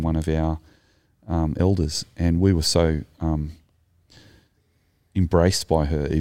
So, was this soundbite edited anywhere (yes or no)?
no